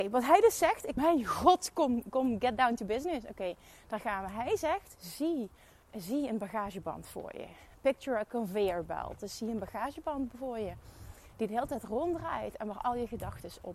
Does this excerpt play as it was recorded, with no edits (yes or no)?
no